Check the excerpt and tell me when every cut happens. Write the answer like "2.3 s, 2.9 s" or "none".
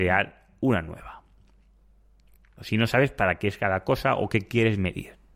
2.6 s